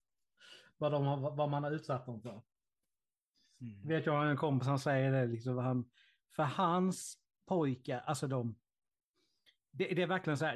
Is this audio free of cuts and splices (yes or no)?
yes